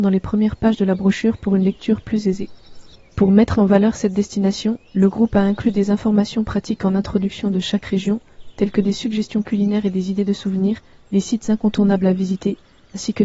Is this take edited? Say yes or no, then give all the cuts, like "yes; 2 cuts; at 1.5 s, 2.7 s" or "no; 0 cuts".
yes; 1 cut; at 3.0 s